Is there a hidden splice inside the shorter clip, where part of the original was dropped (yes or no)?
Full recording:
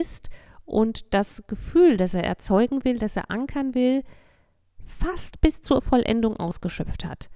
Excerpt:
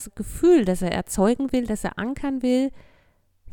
no